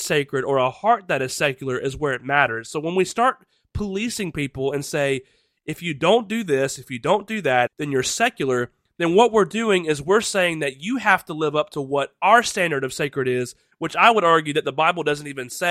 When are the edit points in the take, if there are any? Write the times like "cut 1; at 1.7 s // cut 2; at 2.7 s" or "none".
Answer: cut 1; at 7.7 s // cut 2; at 13.7 s